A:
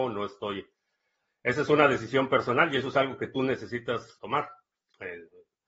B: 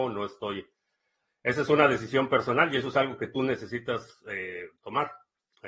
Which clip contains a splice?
A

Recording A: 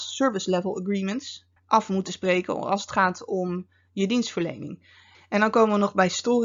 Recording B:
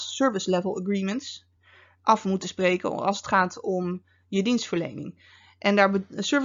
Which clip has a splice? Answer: A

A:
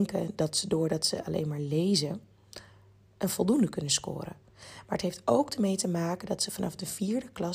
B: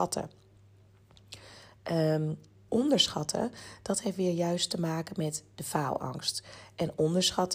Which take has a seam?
B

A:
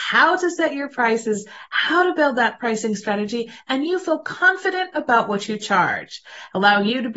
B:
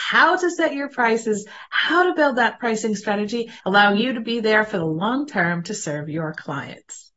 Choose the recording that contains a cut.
B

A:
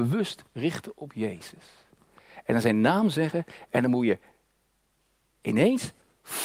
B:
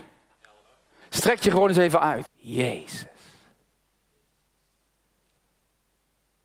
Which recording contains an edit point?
B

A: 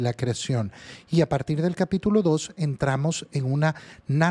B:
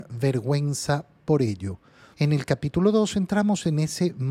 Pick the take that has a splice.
B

